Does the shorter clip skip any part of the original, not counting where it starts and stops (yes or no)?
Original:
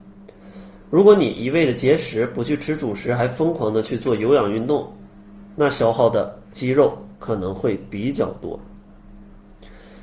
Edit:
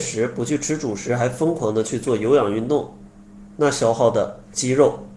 no